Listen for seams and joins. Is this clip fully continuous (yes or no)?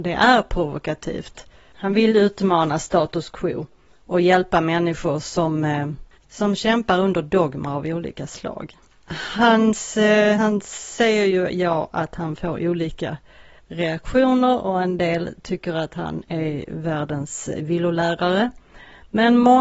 yes